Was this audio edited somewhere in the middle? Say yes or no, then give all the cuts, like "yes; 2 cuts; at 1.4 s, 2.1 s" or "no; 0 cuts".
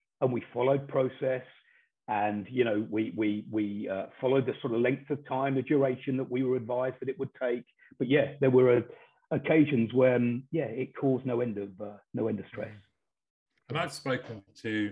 no; 0 cuts